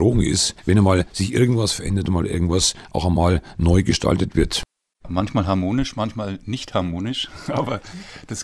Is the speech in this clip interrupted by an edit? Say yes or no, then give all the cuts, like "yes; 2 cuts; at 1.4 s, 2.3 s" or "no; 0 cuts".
yes; 1 cut; at 5.0 s